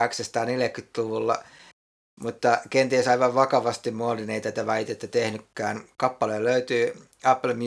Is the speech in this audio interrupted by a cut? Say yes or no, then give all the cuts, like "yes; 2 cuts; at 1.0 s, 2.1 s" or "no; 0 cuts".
no; 0 cuts